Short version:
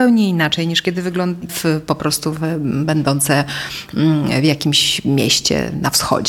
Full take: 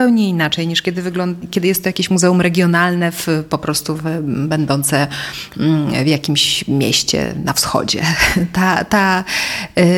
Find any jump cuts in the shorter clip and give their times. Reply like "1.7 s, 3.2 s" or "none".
1.5 s